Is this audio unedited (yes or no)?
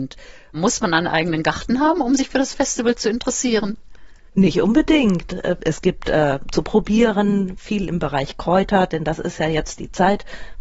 no